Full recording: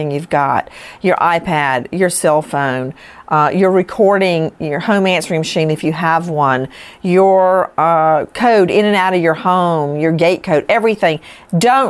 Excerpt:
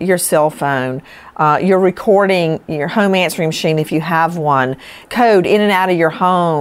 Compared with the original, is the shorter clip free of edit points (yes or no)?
no